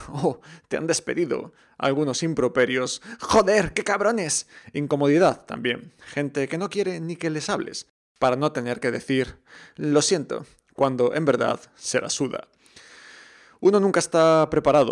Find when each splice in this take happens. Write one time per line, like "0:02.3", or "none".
none